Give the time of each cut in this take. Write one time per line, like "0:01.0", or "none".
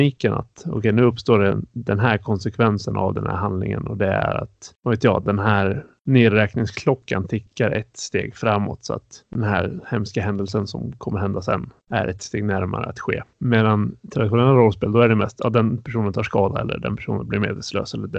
none

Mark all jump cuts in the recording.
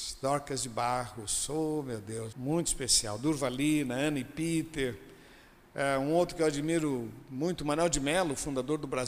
0:02.3

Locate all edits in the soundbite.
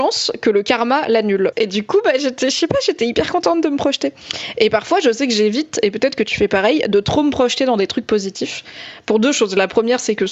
0:01.5

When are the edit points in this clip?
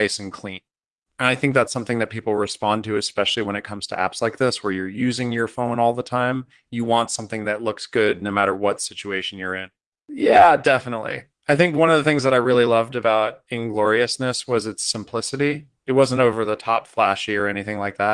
0:09.9

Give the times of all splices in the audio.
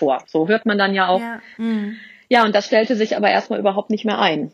0:01.6

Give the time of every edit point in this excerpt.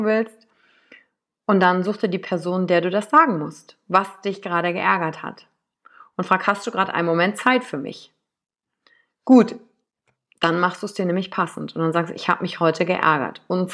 none

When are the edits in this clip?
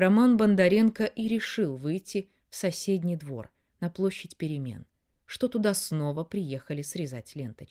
0:05.1

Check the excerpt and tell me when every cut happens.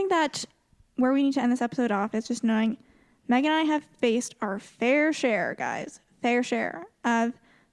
none

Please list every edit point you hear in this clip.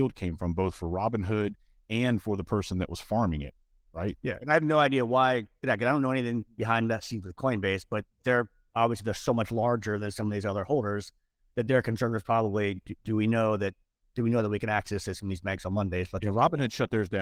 none

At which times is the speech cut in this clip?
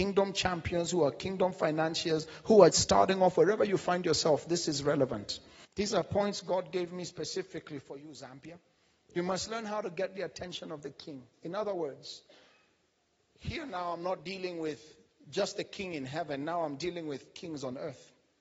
0:02.7
0:05.6

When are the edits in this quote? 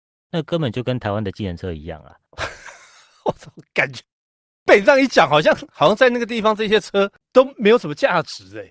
none

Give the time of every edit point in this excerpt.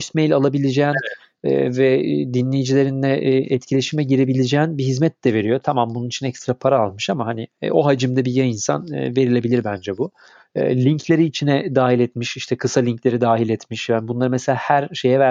none

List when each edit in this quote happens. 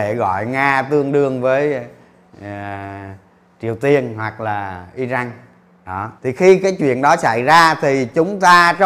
0:06.2

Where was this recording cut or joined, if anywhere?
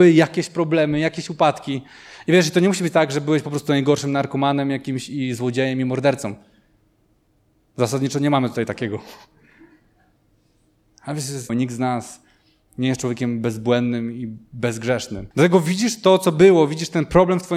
0:11.5
0:15.3

